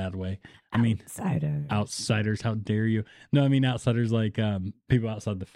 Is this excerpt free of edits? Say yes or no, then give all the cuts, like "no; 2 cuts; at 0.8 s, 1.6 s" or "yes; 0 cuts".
yes; 0 cuts